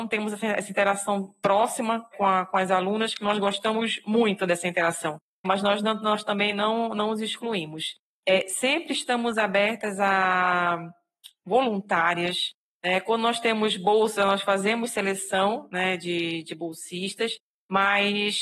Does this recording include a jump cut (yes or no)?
yes